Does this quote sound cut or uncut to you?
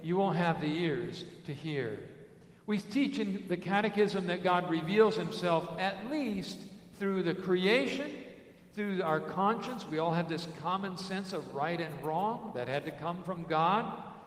uncut